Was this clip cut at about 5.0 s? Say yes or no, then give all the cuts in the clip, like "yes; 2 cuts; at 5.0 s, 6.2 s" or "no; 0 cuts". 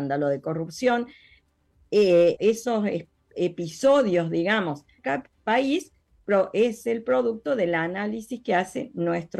yes; 2 cuts; at 2.4 s, 5.0 s